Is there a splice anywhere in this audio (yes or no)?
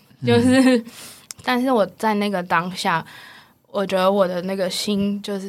yes